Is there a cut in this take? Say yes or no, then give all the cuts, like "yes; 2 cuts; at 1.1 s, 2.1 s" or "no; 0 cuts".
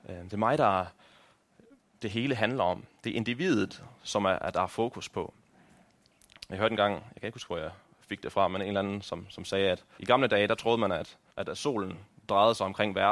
yes; 2 cuts; at 10.0 s, 11.3 s